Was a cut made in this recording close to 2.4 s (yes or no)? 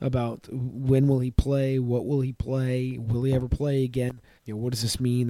no